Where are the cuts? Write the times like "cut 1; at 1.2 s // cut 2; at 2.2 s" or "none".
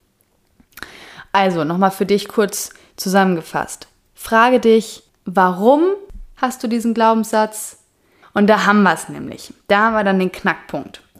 cut 1; at 8.2 s

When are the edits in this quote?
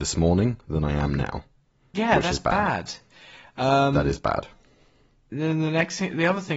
none

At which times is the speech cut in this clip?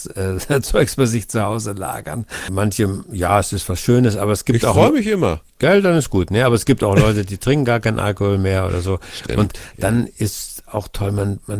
cut 1; at 2.5 s

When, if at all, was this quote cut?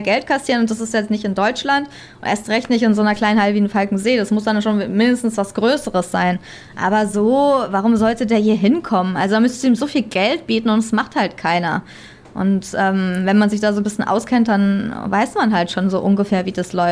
none

